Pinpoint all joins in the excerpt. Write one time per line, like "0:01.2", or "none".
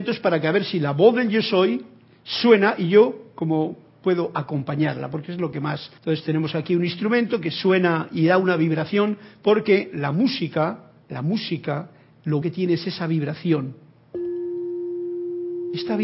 0:06.0
0:11.0
0:12.4